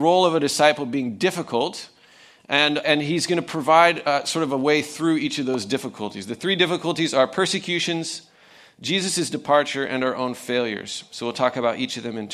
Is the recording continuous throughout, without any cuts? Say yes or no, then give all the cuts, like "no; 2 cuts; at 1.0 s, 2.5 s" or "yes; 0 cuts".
no; 1 cut; at 2.8 s